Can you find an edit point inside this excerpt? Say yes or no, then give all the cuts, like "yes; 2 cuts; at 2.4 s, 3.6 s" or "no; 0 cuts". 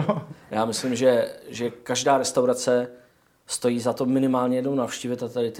no; 0 cuts